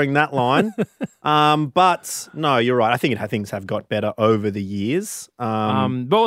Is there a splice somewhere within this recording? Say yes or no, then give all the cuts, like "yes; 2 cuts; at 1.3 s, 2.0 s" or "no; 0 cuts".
no; 0 cuts